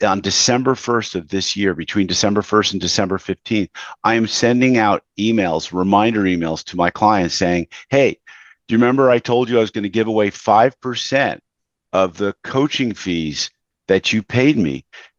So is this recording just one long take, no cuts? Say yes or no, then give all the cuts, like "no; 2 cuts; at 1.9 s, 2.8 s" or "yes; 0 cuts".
yes; 0 cuts